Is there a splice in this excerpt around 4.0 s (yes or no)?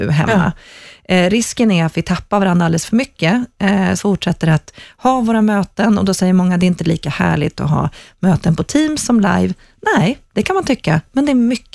yes